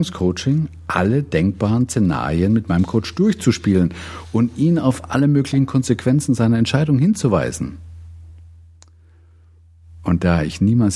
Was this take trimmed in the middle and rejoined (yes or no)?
no